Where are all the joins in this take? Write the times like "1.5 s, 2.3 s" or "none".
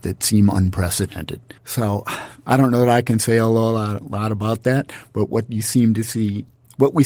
1.6 s